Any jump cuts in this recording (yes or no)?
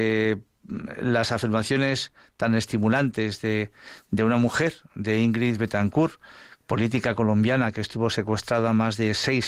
no